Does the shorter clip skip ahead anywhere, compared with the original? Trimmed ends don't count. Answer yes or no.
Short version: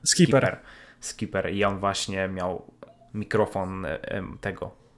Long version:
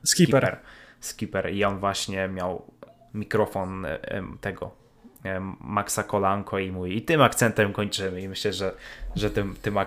no